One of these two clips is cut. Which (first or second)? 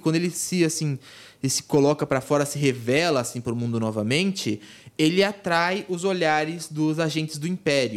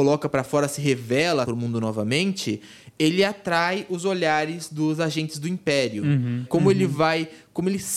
second